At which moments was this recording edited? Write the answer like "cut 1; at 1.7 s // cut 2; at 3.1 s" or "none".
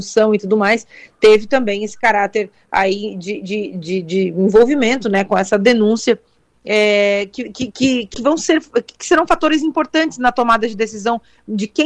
cut 1; at 6.5 s // cut 2; at 8.1 s

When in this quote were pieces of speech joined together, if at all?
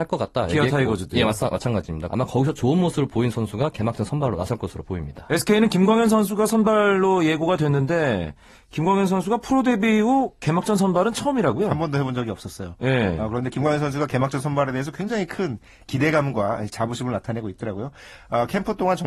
cut 1; at 2.1 s

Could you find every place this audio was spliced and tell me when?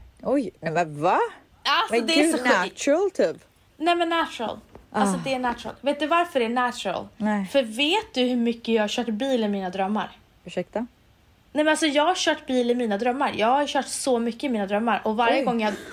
none

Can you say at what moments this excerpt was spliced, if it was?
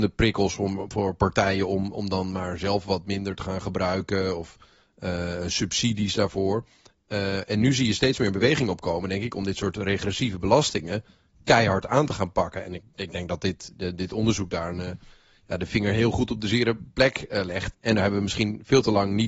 cut 1; at 17.7 s

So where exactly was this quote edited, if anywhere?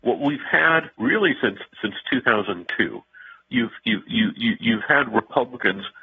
cut 1; at 0.9 s // cut 2; at 4.1 s

